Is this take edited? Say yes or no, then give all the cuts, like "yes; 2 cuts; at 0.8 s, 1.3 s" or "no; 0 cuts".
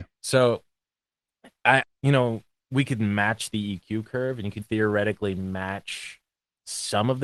yes; 2 cuts; at 1.8 s, 4.6 s